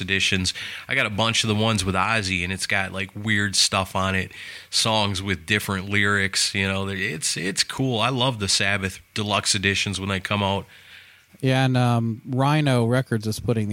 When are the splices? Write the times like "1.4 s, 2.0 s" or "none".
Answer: 11.3 s